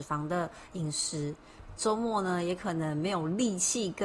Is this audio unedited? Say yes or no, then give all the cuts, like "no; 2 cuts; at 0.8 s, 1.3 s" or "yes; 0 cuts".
no; 1 cut; at 1.8 s